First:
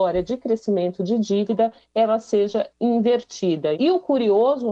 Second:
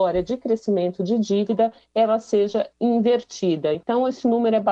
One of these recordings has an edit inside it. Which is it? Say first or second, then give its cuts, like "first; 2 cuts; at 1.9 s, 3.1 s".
first; 1 cut; at 3.7 s